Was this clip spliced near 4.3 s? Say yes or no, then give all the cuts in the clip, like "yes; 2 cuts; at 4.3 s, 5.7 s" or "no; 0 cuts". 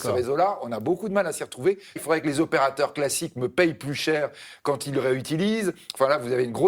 no; 1 cut; at 2.0 s